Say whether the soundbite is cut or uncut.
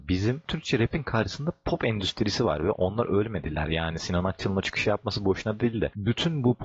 uncut